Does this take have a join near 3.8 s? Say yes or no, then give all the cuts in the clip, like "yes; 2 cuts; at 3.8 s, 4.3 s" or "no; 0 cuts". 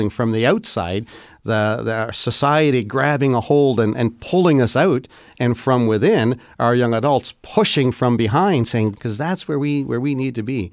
no; 1 cut; at 8.9 s